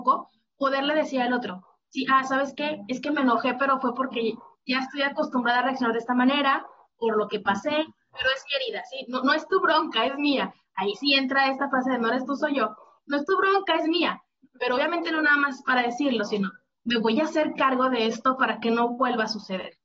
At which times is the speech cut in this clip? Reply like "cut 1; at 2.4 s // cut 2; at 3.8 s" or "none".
none

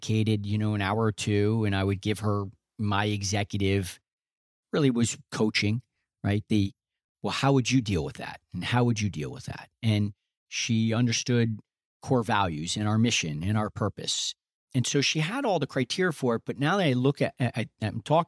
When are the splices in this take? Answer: none

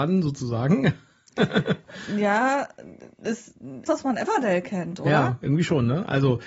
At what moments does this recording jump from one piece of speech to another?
cut 1; at 3.9 s

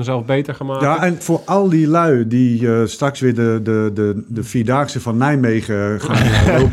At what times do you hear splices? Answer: cut 1; at 1.2 s

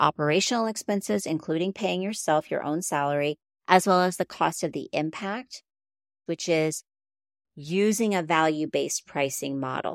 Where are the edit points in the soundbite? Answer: cut 1; at 6.3 s

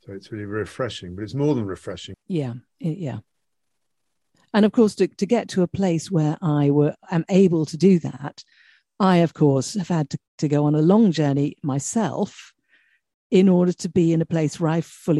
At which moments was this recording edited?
cut 1; at 2.1 s

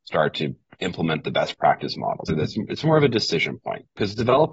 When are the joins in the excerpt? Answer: cut 1; at 2.3 s

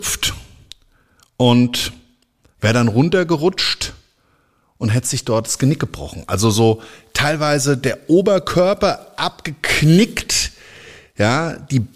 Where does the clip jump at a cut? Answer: none

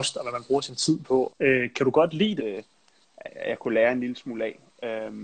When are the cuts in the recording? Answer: cut 1; at 1.3 s // cut 2; at 2.4 s

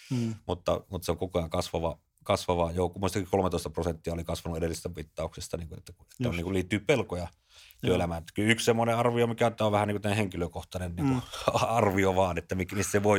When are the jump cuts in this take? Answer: none

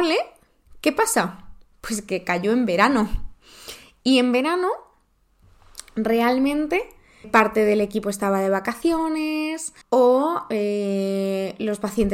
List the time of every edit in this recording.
cut 1; at 7.2 s // cut 2; at 9.8 s

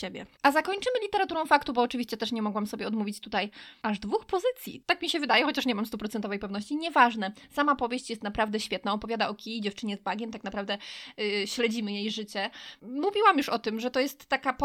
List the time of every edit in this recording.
cut 1; at 4.8 s

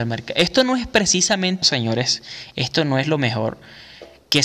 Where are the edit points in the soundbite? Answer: cut 1; at 1.6 s

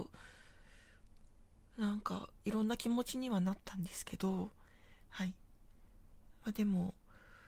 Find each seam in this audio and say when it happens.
none

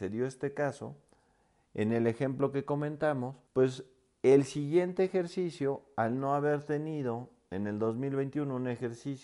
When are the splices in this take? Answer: cut 1; at 3.5 s

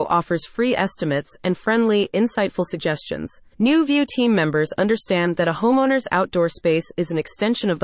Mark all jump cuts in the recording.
cut 1; at 3.5 s

